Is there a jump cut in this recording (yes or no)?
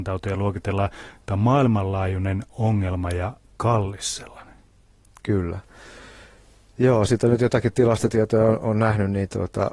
no